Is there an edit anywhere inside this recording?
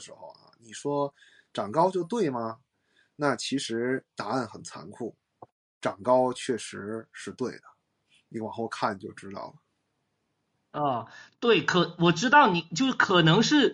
no; 0 cuts

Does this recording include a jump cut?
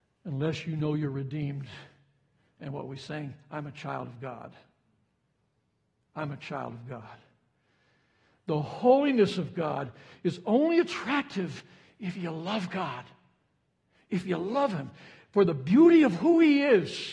no; 0 cuts

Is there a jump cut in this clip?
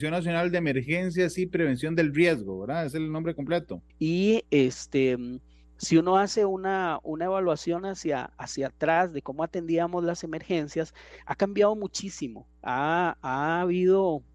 yes; 1 cut; at 3.9 s

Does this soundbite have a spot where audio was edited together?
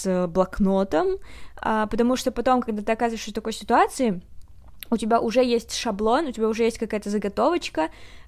no; 0 cuts

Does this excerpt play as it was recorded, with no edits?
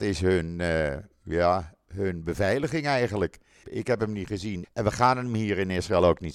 no; 2 cuts; at 3.6 s, 4.6 s

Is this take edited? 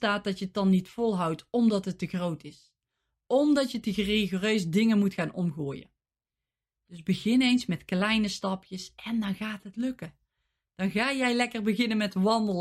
no; 0 cuts

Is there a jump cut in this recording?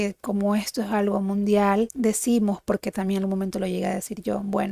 no; 0 cuts

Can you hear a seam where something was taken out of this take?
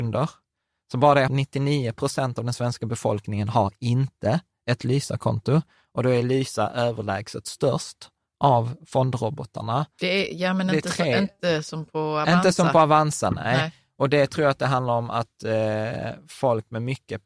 yes; 2 cuts; at 1.3 s, 10.0 s

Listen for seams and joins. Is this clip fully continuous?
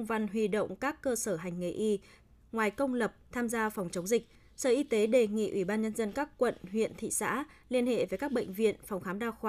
yes; 0 cuts

